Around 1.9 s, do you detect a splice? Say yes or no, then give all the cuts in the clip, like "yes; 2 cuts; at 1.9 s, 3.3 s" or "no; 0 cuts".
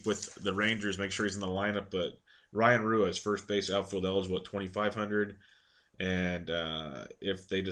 no; 0 cuts